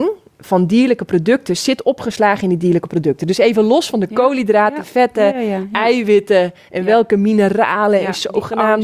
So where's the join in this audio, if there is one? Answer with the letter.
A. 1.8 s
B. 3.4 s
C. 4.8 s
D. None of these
D